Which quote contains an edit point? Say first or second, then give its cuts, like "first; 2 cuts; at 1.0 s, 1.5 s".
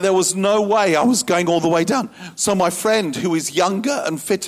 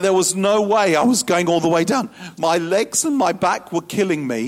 second; 1 cut; at 2.4 s